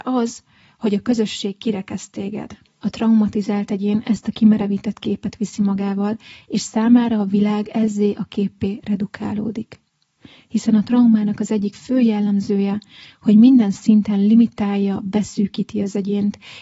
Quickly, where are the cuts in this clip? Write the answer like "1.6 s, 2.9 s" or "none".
2.6 s